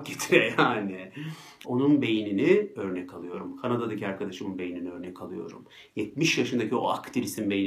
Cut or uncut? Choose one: cut